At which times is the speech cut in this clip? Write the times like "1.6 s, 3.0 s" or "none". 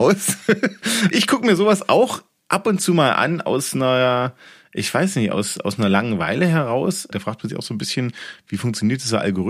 1.1 s, 7.1 s